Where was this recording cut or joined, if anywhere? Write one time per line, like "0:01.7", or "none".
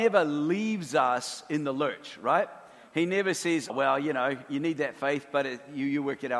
0:03.7